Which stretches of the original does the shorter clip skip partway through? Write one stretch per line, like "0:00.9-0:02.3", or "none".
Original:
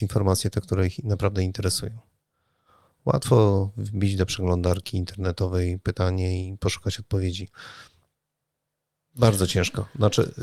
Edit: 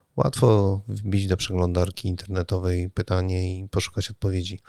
none

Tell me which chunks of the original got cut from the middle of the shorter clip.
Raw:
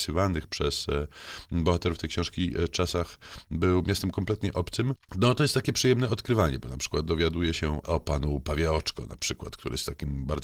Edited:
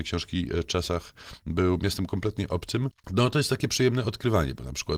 none

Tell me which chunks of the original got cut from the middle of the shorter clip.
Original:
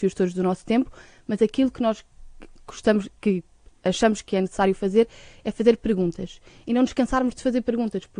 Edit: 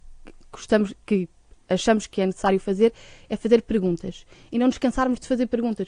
none

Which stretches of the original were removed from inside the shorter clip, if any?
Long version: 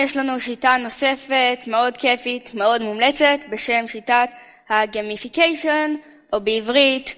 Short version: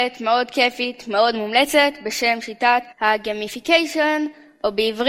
0:04.4-0:04.6

